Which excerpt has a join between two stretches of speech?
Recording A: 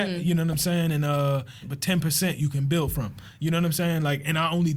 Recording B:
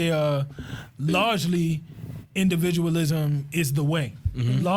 A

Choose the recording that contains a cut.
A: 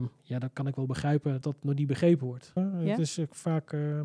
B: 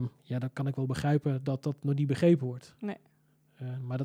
A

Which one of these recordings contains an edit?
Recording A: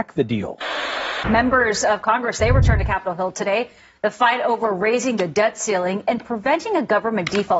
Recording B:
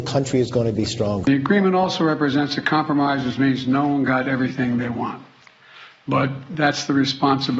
B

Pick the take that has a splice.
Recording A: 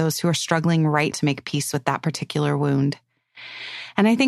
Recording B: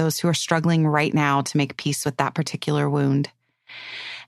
A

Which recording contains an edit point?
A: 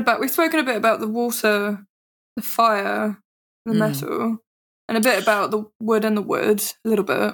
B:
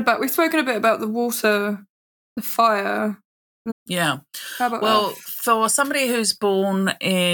B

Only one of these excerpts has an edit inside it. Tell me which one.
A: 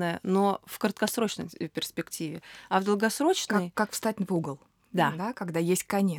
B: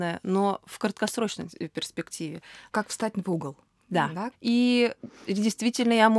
B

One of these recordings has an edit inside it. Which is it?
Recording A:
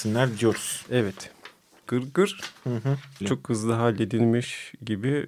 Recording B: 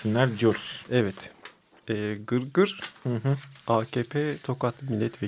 A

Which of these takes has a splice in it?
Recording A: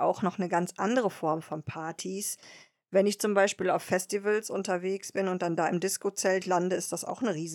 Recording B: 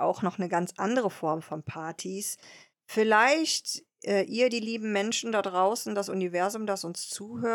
B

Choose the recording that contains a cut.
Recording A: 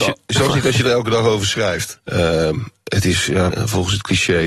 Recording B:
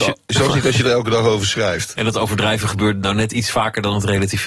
A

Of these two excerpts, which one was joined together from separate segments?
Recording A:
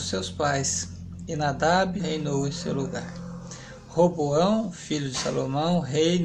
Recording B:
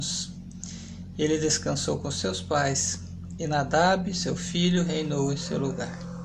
A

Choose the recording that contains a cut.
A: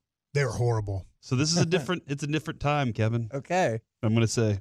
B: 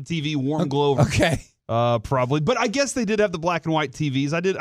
B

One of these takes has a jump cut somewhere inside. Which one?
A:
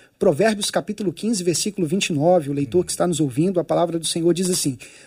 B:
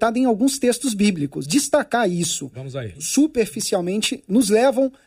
B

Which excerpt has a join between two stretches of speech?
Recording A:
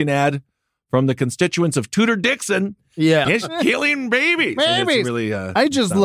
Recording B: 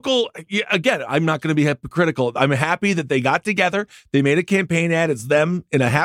A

